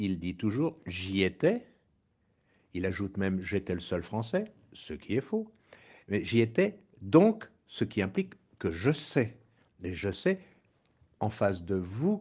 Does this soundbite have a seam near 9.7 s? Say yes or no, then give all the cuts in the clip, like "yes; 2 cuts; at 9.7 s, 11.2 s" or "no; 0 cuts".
no; 0 cuts